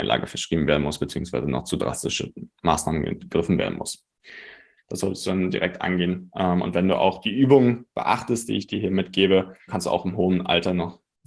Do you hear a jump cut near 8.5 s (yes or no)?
no